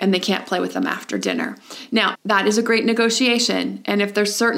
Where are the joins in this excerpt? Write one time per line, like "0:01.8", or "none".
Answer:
0:02.1

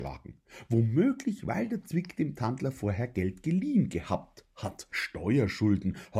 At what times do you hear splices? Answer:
0:04.9

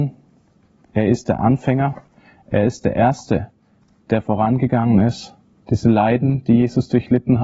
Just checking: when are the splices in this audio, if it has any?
0:05.6

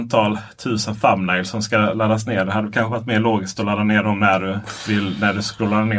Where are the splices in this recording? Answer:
none

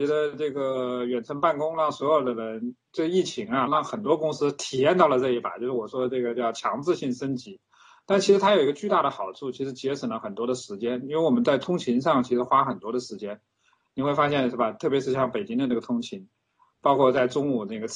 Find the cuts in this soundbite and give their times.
0:03.7

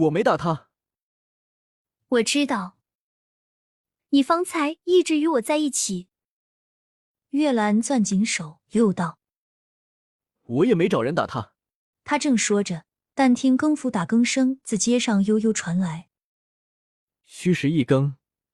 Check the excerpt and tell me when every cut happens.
0:11.9

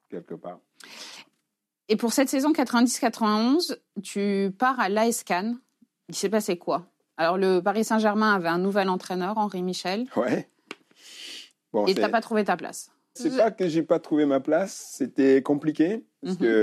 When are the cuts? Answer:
0:13.2

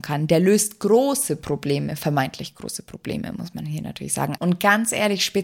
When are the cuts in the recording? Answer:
0:04.4

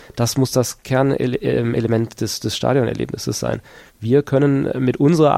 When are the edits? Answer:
none

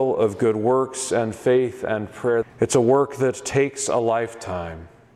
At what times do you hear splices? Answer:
0:02.4

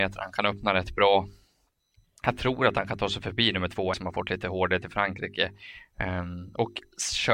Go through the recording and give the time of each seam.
0:03.9

